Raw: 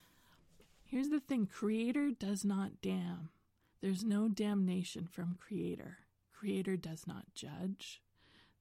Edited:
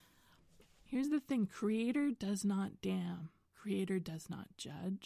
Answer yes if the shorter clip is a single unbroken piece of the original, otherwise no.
no